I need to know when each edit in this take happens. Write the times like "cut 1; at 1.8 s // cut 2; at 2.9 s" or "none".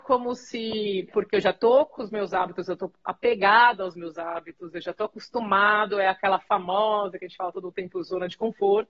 cut 1; at 1.1 s